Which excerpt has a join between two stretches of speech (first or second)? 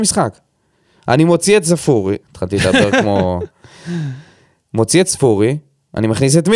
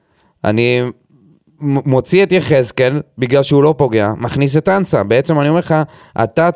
first